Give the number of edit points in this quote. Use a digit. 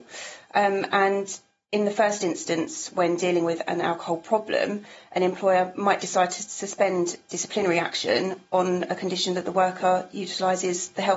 0